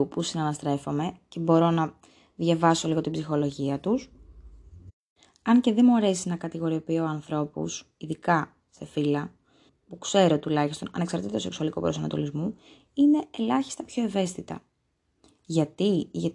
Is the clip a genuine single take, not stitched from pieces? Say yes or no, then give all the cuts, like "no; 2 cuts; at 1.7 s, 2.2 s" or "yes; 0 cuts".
no; 1 cut; at 9.7 s